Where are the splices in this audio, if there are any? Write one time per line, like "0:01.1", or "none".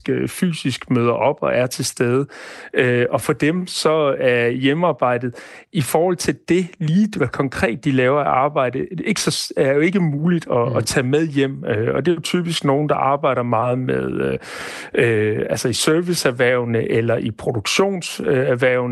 none